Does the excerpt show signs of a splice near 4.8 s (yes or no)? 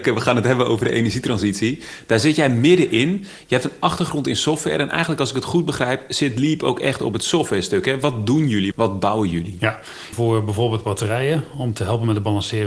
no